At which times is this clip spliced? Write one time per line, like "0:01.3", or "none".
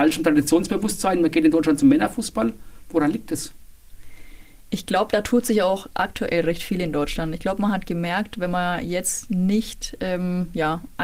none